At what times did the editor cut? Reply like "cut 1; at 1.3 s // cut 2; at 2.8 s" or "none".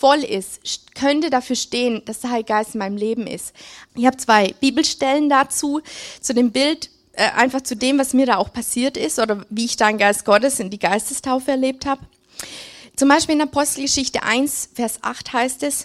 cut 1; at 3.9 s